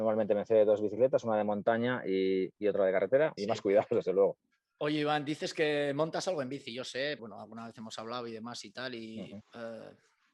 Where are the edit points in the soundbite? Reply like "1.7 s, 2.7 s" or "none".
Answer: 3.4 s, 7.2 s, 9.4 s